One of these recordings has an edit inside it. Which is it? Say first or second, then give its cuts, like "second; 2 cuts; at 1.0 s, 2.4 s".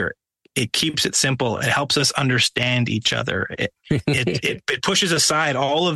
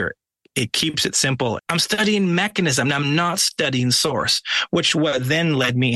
second; 1 cut; at 1.6 s